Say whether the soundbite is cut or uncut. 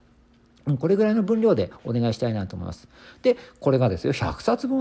uncut